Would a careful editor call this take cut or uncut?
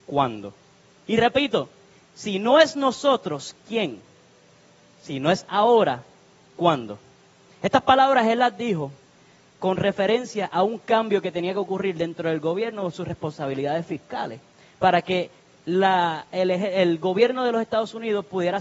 uncut